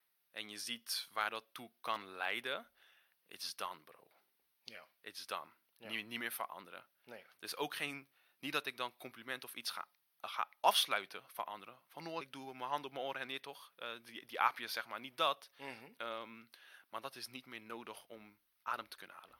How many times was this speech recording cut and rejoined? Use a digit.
1